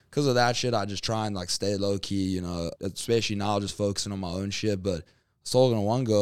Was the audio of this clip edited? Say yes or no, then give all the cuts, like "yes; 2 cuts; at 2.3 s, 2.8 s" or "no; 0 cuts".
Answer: yes; 1 cut; at 2.8 s